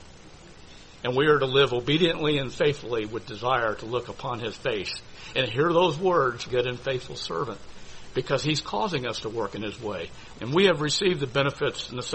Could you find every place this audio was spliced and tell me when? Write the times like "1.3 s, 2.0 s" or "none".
6.5 s, 10.3 s